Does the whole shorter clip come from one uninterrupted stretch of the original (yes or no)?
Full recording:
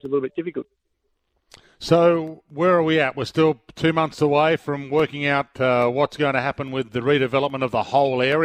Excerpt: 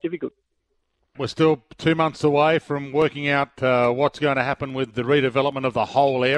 no